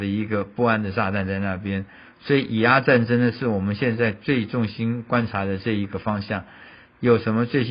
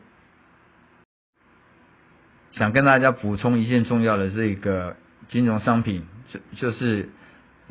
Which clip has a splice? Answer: second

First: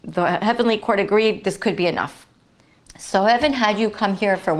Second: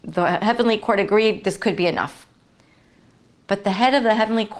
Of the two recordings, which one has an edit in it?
first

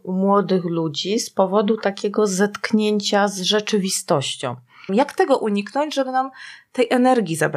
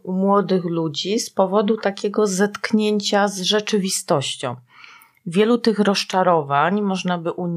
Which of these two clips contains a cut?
first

